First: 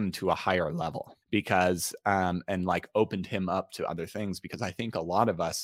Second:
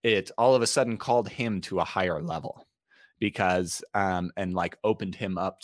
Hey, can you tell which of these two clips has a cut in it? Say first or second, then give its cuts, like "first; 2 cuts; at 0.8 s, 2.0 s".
first; 1 cut; at 1.2 s